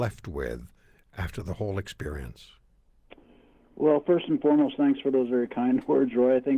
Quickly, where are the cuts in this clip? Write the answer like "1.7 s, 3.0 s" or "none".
none